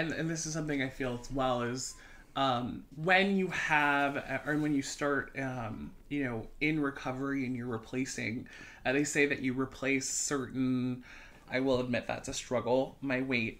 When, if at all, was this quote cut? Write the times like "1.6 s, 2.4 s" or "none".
2.9 s, 11.3 s

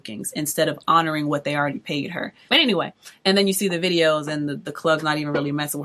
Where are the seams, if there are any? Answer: 2.5 s

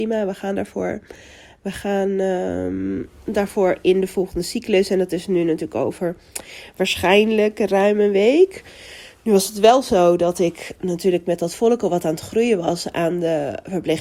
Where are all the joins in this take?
none

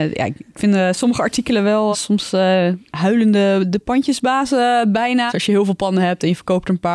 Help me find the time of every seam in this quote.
1.9 s, 5.3 s

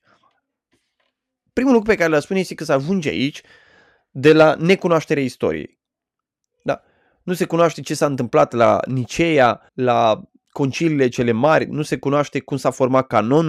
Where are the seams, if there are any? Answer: 9.7 s

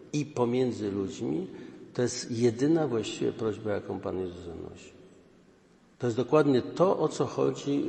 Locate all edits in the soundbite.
none

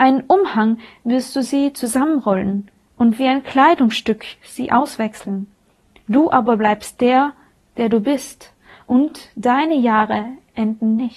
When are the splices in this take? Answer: none

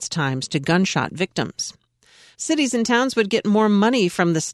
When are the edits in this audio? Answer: 2.3 s

